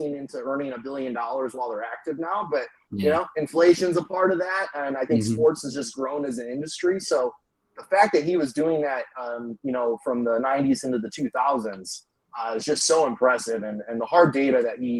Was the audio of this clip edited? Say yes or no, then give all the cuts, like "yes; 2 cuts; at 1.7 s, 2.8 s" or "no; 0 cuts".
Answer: no; 0 cuts